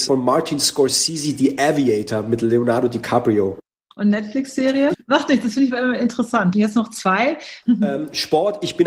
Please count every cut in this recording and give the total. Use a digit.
3